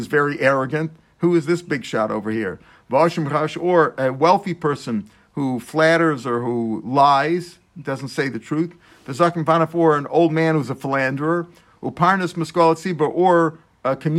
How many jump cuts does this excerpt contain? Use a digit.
0